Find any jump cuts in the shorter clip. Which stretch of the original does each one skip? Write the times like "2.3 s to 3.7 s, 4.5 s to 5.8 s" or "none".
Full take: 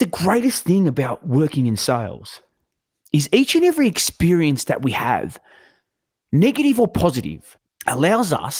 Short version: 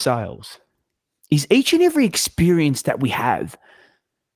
none